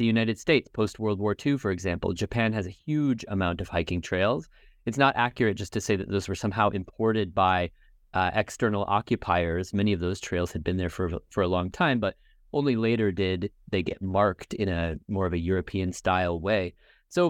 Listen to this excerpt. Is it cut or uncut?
uncut